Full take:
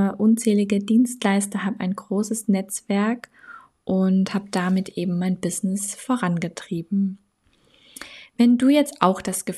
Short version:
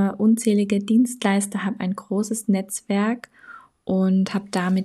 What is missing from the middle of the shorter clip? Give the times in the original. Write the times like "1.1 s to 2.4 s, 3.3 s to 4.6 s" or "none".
none